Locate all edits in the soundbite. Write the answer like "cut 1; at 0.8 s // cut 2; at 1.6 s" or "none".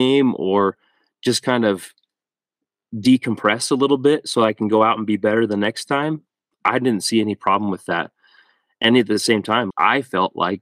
cut 1; at 9.7 s